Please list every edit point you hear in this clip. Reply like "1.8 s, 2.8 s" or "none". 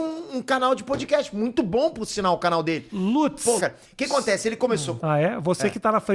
3.6 s, 5.0 s